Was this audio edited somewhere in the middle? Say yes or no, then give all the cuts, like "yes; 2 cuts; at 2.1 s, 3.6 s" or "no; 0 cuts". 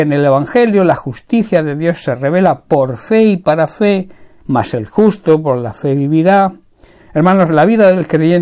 yes; 2 cuts; at 4.4 s, 7.0 s